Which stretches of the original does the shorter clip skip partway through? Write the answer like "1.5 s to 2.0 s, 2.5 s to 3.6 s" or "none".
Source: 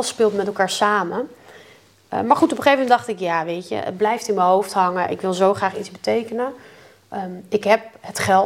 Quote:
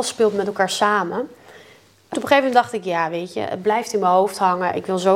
2.1 s to 2.5 s